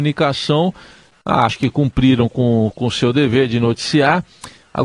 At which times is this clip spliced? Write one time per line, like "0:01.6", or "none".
none